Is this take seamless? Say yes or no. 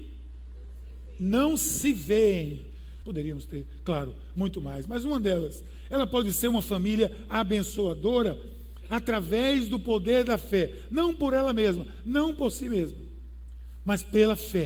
no